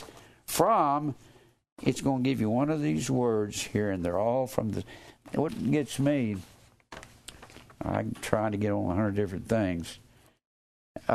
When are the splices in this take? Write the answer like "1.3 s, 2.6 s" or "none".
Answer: 5.5 s